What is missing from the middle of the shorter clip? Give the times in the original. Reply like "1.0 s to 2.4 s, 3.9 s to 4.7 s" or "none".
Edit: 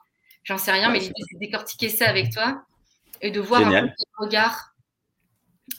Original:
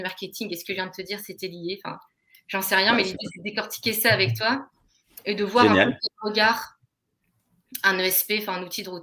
none